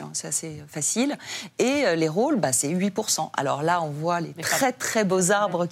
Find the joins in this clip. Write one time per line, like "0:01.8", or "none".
none